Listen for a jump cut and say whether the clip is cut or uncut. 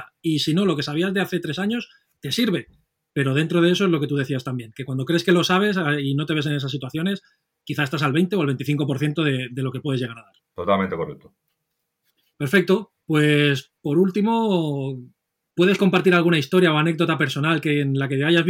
uncut